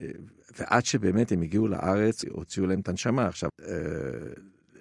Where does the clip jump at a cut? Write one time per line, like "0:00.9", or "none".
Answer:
0:02.2
0:03.5